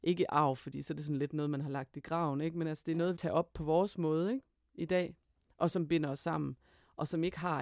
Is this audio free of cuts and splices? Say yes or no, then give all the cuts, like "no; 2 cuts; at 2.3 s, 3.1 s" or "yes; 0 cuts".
no; 1 cut; at 3.2 s